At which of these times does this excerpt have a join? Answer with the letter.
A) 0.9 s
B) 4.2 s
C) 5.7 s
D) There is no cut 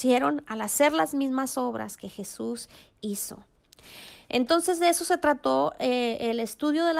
D